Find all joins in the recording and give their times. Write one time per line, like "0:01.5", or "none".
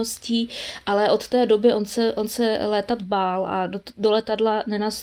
none